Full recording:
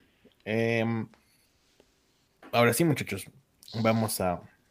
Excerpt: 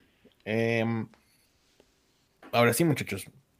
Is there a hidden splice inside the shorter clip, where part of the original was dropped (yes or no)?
no